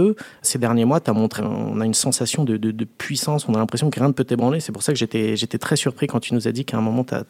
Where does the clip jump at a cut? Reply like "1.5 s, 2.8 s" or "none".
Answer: 1.4 s